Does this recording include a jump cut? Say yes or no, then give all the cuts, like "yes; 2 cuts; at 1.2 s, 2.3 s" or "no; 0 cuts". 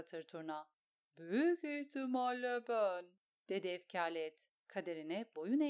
no; 0 cuts